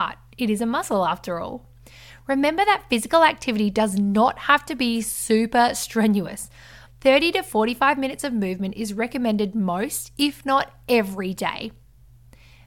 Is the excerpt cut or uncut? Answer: cut